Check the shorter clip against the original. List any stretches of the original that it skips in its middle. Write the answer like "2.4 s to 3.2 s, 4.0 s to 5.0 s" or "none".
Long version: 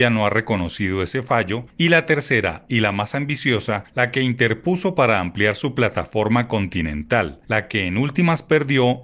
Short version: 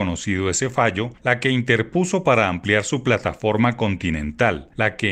1.7 s to 3.9 s